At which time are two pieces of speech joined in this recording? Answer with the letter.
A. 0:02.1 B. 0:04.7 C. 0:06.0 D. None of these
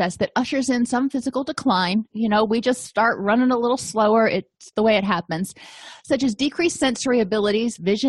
B